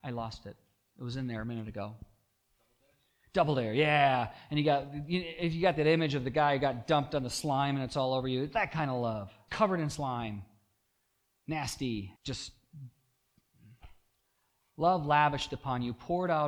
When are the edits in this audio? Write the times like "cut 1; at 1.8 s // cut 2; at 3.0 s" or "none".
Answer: cut 1; at 9.5 s // cut 2; at 12.2 s